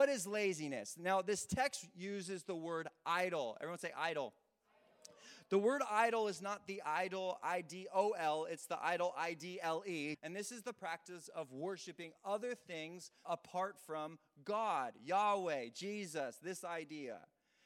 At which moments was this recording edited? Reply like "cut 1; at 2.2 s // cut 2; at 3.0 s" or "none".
cut 1; at 10.1 s // cut 2; at 13.2 s